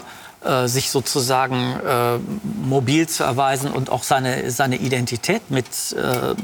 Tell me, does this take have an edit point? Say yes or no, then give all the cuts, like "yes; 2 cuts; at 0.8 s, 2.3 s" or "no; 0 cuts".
no; 0 cuts